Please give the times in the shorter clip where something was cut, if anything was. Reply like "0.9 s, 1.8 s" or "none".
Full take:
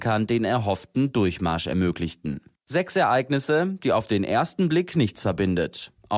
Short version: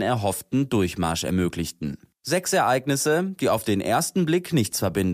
none